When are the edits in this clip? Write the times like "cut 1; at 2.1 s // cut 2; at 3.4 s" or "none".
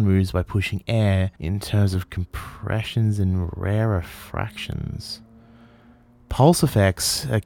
cut 1; at 1.4 s